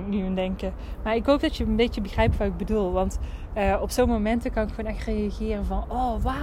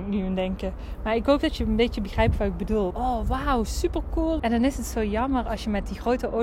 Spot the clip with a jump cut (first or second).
second